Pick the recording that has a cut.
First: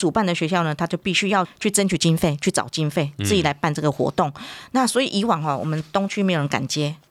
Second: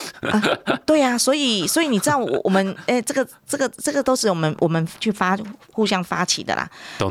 first; 1 cut; at 1.4 s

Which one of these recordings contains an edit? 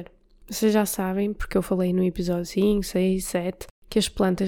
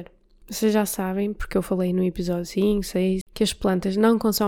second; 1 cut; at 3.2 s

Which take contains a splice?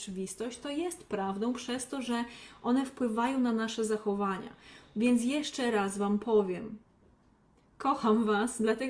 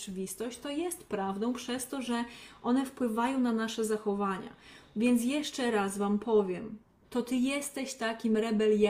second; 1 cut; at 7.0 s

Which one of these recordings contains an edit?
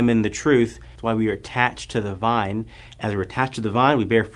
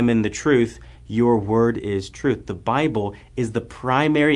first; 1 cut; at 1.0 s

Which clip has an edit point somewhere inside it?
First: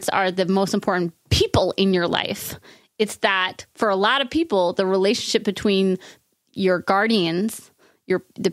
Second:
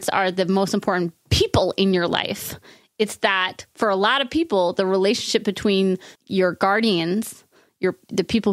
second; 1 cut; at 6.2 s

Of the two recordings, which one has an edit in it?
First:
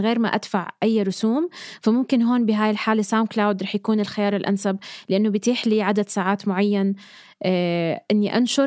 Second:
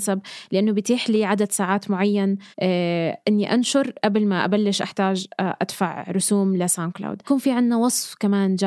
second; 1 cut; at 2.5 s

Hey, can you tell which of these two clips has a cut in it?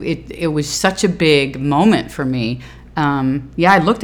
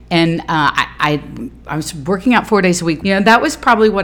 second; 1 cut; at 3.0 s

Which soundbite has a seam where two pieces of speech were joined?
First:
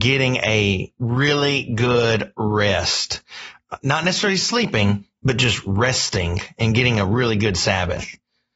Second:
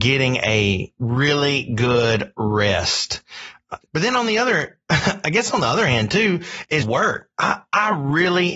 second; 2 cuts; at 3.8 s, 6.8 s

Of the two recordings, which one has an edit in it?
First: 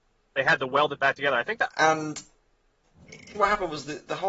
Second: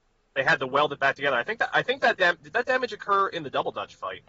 first; 2 cuts; at 1.7 s, 3.3 s

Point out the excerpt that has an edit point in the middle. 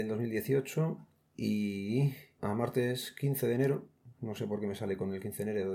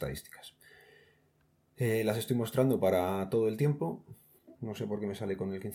second; 1 cut; at 4.5 s

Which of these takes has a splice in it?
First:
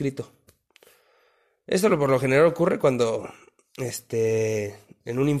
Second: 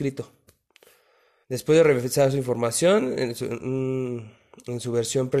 second; 1 cut; at 1.4 s

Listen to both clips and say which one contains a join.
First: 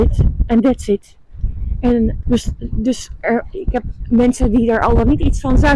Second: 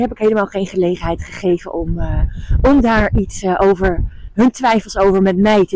first; 1 cut; at 2.2 s

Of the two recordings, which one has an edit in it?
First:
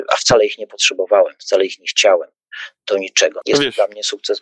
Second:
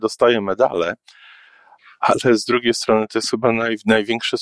first; 1 cut; at 3.4 s

